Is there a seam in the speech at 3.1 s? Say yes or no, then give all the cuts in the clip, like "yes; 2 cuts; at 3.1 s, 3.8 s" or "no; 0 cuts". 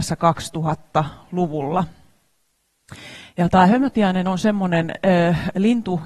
no; 0 cuts